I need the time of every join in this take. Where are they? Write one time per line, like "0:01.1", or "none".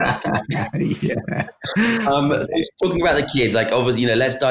none